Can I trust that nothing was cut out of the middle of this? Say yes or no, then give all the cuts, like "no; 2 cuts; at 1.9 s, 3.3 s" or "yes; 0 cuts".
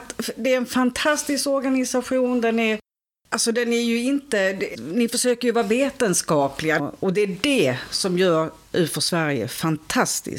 no; 2 cuts; at 4.7 s, 6.8 s